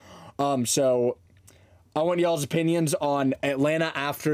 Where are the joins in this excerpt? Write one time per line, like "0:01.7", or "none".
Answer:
none